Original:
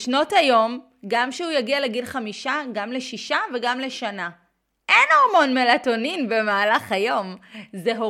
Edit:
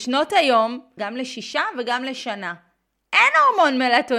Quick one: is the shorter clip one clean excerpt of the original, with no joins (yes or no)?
no